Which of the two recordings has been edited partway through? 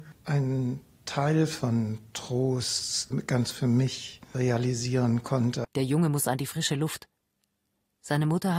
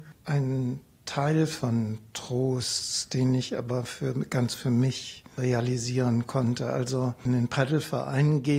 first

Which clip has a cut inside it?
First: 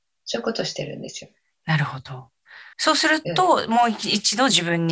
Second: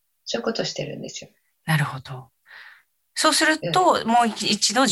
first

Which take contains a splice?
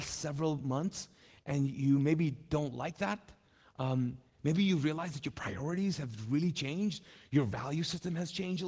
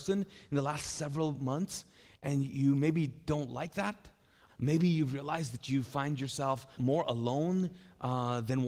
second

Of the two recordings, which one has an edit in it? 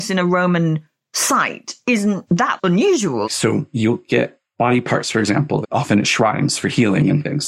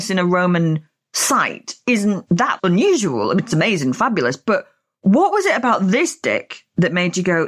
first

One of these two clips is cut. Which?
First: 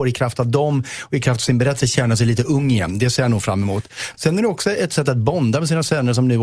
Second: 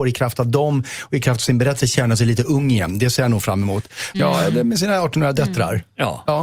second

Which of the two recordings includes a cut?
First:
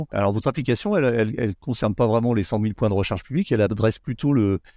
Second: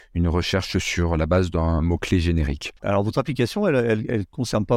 second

